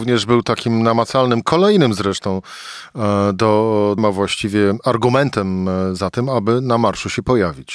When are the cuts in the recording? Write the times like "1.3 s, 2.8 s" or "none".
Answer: 4.0 s